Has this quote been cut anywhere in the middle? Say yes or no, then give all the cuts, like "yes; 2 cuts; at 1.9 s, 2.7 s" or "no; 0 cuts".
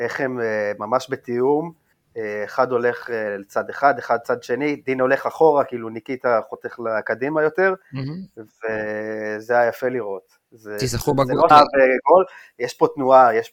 yes; 1 cut; at 11.5 s